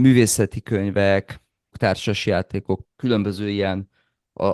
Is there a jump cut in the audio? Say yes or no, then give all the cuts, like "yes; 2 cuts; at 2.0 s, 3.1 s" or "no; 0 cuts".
yes; 2 cuts; at 1.7 s, 2.8 s